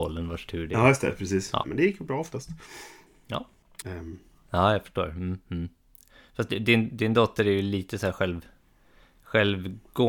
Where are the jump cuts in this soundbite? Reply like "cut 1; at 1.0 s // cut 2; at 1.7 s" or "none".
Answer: cut 1; at 1.6 s // cut 2; at 3.8 s